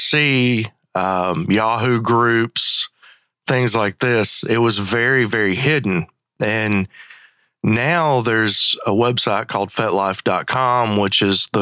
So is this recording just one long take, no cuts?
yes; 0 cuts

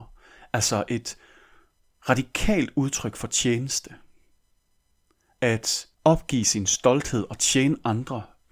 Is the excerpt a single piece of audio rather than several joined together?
no; 1 cut; at 5.9 s

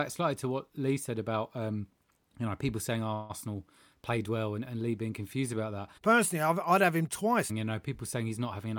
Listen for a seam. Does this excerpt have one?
yes; 2 cuts; at 6.0 s, 7.5 s

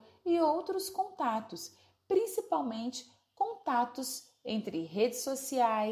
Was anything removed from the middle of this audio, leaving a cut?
no; 0 cuts

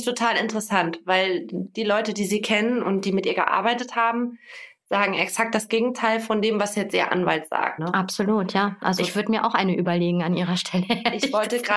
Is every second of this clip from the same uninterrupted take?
no; 2 cuts; at 7.8 s, 9.0 s

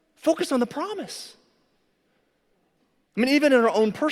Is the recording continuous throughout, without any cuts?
no; 1 cut; at 3.1 s

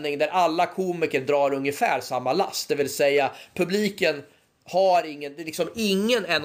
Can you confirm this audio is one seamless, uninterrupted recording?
yes; 0 cuts

